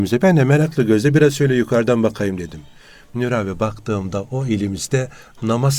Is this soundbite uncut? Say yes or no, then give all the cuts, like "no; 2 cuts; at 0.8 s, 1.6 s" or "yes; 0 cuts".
yes; 0 cuts